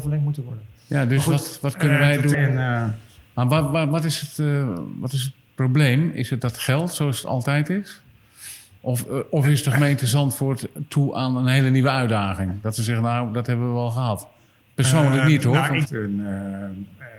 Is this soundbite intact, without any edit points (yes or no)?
no